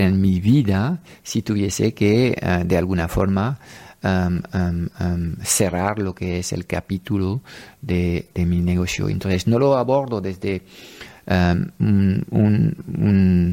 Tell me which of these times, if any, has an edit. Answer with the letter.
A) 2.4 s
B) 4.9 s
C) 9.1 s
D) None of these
D